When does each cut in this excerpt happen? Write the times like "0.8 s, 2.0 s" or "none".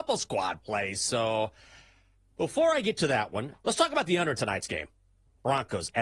3.5 s